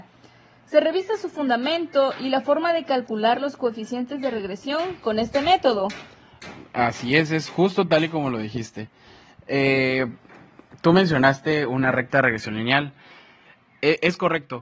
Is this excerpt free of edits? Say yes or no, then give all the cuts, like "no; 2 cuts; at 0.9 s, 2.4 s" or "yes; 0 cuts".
yes; 0 cuts